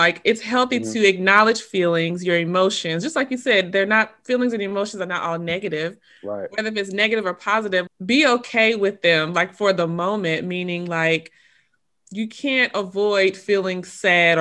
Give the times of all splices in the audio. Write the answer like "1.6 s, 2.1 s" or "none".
7.9 s